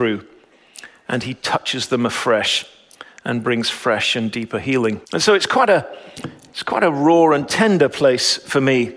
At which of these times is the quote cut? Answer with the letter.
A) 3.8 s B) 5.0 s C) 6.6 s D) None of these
B